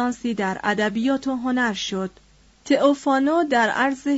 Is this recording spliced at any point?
yes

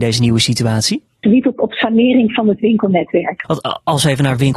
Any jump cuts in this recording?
yes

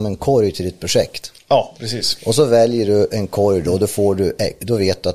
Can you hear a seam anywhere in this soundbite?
no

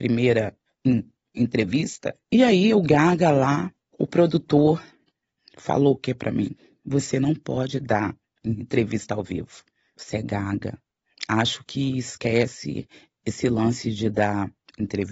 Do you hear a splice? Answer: no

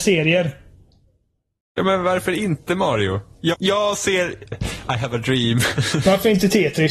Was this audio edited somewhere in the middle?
yes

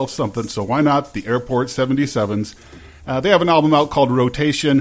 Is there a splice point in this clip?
no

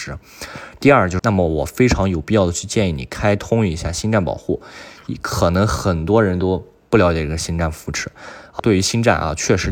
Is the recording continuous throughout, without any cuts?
no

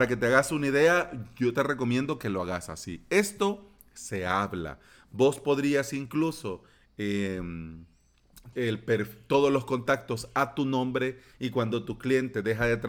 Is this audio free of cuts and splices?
no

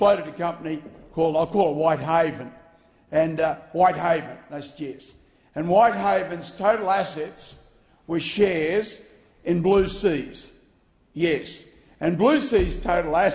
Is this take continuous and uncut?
yes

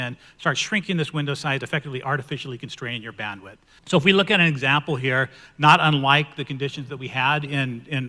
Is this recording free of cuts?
no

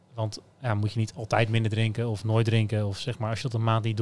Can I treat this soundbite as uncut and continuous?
yes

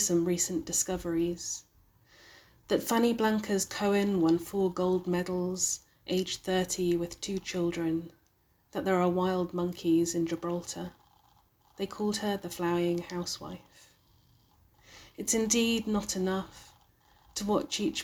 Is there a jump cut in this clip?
no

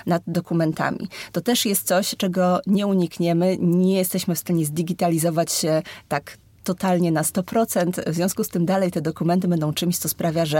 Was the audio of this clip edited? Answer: no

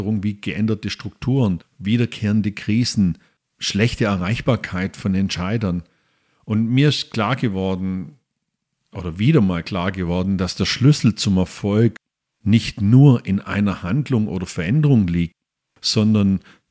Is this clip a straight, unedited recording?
yes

